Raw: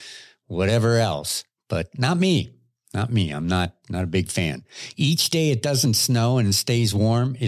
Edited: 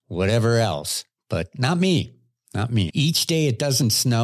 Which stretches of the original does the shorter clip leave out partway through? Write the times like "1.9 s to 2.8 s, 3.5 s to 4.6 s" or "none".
3.3 s to 4.9 s